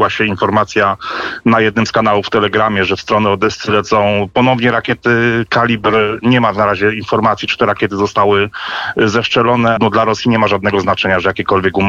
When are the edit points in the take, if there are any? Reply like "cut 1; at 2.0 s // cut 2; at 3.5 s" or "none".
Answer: cut 1; at 9.8 s